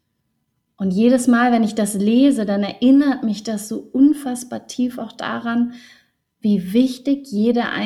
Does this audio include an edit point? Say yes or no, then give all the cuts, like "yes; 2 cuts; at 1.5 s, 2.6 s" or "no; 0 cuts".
no; 0 cuts